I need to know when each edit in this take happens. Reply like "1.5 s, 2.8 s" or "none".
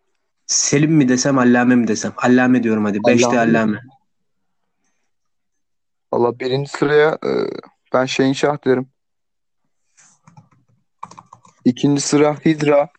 none

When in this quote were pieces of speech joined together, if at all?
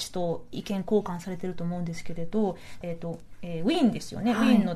2.8 s

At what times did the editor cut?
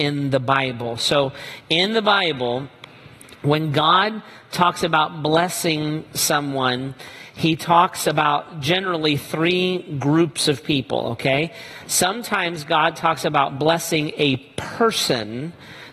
none

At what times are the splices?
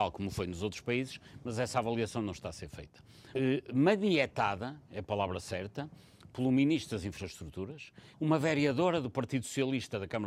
3.3 s, 8.1 s

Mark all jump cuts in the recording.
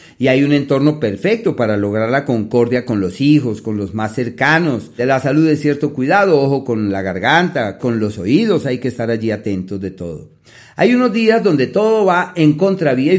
5.0 s, 7.8 s

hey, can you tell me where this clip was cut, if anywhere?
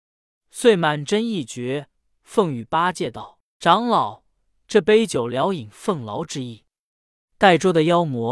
none

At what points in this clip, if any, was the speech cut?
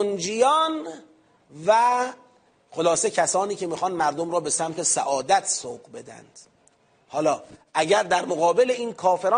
none

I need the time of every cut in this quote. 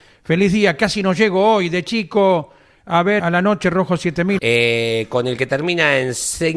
3.2 s, 4.4 s

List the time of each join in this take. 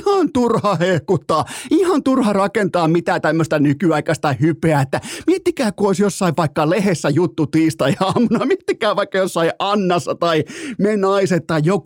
none

